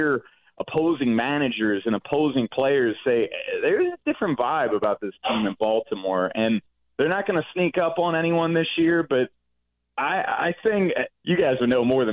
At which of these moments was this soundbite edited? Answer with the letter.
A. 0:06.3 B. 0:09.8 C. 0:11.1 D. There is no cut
C